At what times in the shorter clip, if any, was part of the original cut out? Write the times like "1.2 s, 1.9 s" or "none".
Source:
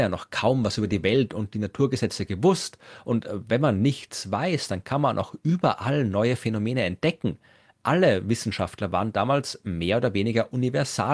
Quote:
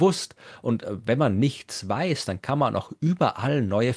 none